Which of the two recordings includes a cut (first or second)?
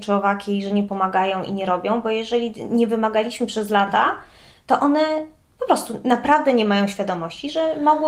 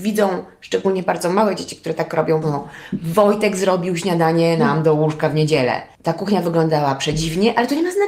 second